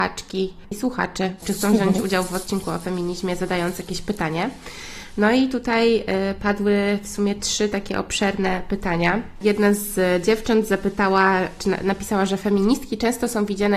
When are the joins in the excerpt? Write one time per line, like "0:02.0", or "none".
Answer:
none